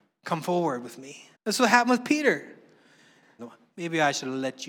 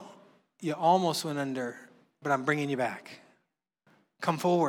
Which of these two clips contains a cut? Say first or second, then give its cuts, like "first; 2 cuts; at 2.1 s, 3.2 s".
first; 2 cuts; at 1.3 s, 3.4 s